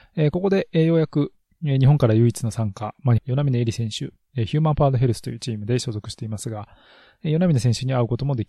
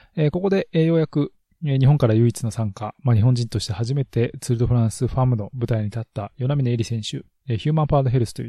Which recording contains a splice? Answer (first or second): first